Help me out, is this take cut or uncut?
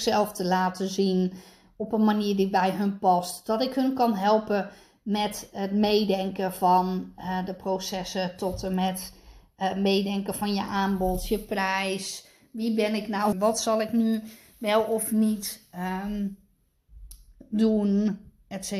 cut